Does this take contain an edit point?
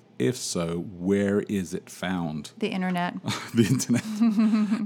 no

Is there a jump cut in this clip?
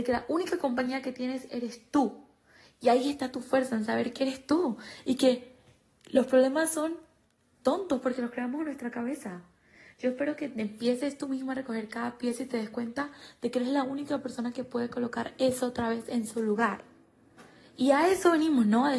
no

